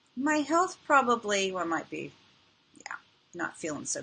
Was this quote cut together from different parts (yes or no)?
no